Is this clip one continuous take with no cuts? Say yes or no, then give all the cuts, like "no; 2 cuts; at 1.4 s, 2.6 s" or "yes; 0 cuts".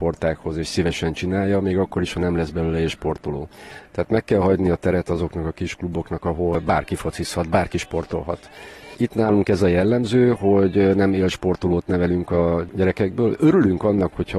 yes; 0 cuts